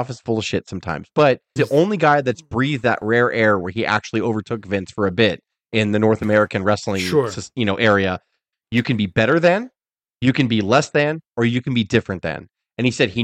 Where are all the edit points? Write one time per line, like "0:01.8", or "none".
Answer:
0:01.6
0:08.5